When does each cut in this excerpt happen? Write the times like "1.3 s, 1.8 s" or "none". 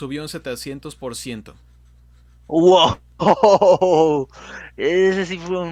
none